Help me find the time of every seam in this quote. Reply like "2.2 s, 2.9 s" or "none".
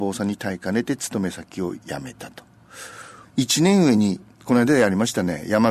3.2 s